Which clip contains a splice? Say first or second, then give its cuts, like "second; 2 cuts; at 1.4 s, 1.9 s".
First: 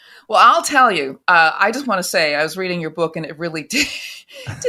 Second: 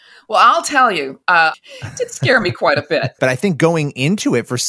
second; 2 cuts; at 1.5 s, 3.2 s